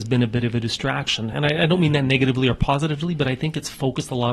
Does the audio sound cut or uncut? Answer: uncut